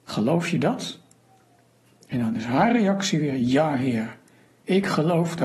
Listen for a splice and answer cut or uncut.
uncut